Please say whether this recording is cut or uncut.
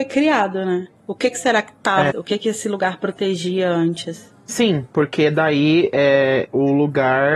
cut